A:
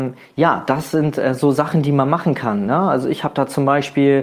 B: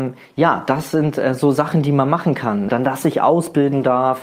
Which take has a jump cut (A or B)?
B